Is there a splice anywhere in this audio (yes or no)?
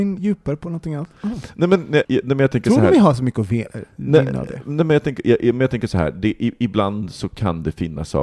yes